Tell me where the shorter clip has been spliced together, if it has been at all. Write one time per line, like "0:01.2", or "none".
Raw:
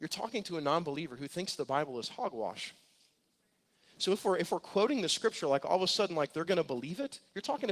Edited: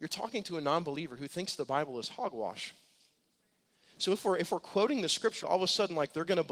0:05.4

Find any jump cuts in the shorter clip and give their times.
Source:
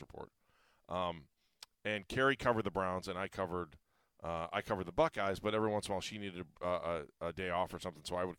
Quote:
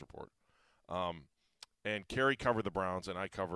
none

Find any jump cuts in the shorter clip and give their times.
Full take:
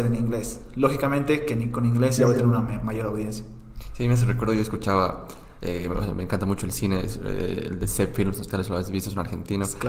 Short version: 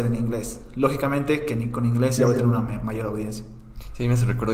none

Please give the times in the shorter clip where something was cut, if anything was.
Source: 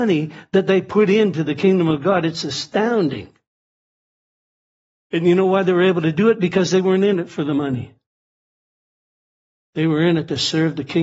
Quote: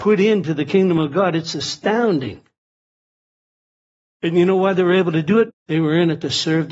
0:05.5

